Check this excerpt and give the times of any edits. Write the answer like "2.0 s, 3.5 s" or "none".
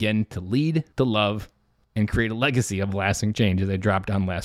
0.9 s